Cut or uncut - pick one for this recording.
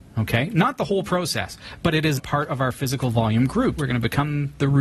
cut